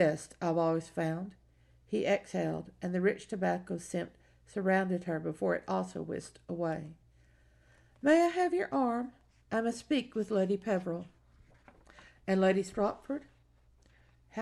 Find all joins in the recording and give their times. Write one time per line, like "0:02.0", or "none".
none